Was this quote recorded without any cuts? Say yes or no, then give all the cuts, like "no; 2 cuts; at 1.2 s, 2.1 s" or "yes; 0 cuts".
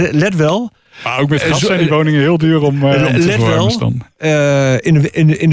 yes; 0 cuts